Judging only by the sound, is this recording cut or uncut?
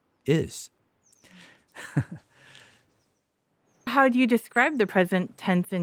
cut